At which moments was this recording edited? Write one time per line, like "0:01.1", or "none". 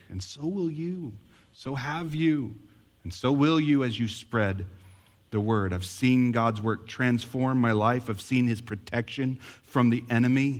none